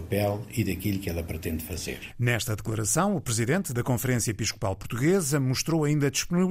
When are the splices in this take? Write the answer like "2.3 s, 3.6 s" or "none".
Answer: none